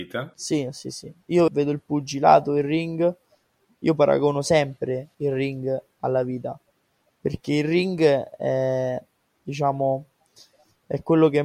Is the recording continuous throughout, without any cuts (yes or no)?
no